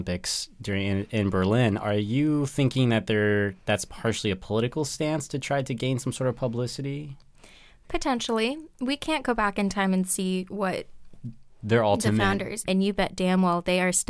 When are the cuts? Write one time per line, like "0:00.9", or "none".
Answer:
0:12.6